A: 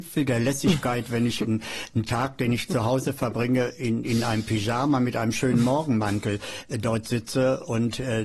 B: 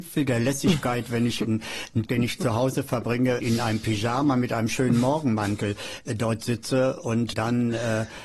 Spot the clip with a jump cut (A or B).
B